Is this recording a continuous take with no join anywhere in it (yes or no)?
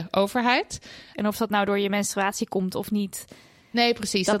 no